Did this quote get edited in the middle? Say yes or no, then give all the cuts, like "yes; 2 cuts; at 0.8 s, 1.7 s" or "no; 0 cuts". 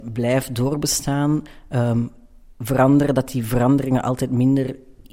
no; 0 cuts